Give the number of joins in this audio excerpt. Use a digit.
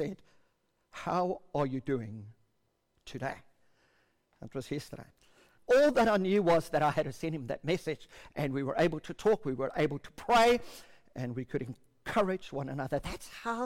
1